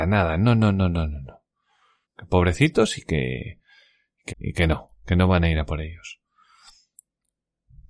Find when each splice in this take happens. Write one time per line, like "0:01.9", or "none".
0:02.0
0:04.3